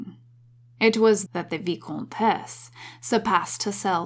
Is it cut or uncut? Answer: cut